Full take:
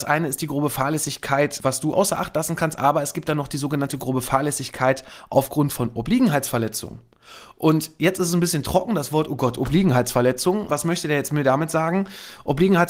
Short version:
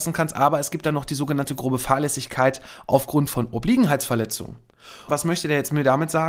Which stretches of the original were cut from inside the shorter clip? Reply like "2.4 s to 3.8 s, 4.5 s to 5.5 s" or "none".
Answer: 7.5 s to 10.7 s